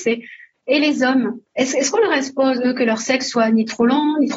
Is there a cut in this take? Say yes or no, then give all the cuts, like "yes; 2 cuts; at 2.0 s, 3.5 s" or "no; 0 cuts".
yes; 1 cut; at 1.5 s